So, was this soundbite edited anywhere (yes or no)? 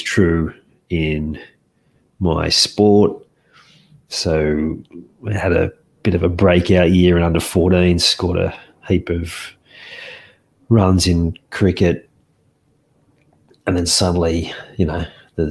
no